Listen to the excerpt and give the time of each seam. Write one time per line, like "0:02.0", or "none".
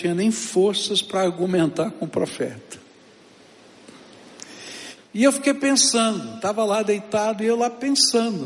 0:05.0